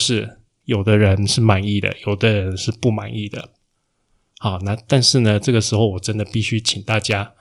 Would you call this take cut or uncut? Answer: uncut